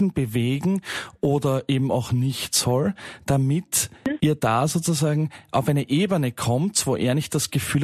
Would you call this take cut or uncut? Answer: uncut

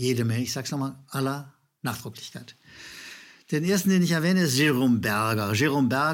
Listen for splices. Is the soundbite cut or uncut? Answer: uncut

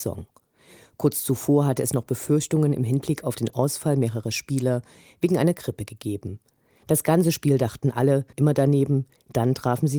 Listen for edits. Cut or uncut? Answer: cut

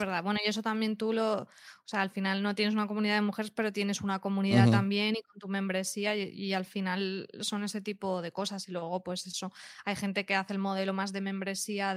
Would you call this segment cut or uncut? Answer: uncut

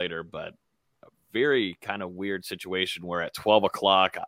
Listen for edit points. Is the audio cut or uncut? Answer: uncut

